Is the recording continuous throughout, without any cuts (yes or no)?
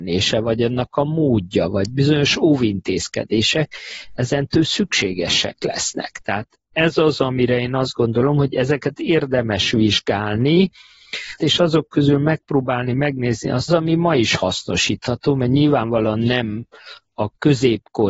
no